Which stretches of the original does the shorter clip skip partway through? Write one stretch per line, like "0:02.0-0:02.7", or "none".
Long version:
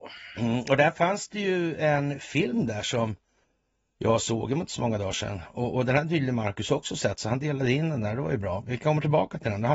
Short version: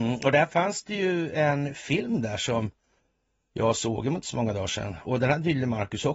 0:05.5-0:05.7